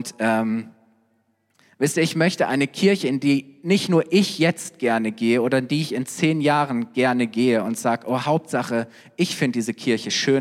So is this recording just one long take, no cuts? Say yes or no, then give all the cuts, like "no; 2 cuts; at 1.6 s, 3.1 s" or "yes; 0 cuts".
yes; 0 cuts